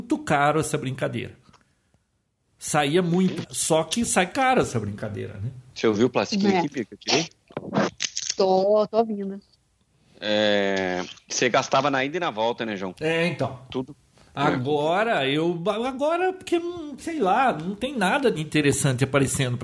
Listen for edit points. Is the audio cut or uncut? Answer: cut